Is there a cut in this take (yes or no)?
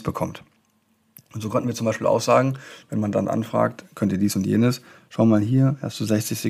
no